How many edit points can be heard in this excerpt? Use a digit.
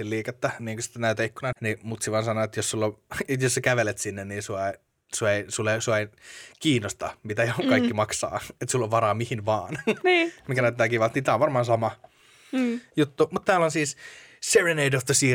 1